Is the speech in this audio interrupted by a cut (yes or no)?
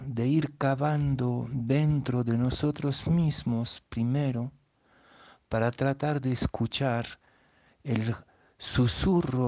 no